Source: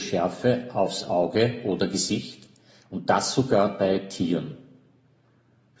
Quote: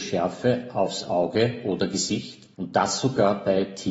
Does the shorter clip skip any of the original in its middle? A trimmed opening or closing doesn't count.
yes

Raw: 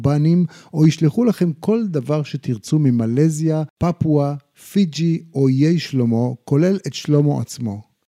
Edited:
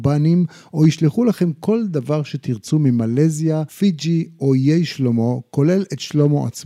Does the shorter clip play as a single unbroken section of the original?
no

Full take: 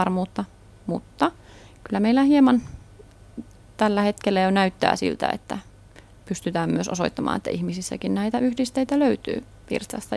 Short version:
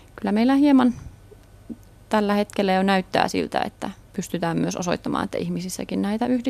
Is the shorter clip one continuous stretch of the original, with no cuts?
no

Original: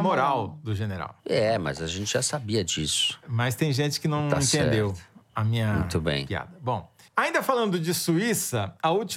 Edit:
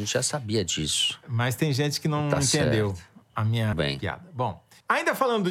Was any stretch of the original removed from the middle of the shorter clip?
yes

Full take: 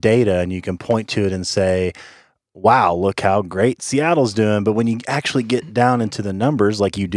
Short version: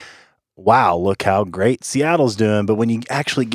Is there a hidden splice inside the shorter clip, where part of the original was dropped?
no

